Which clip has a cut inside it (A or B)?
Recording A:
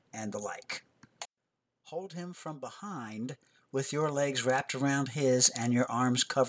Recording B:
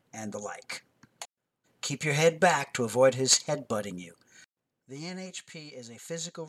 B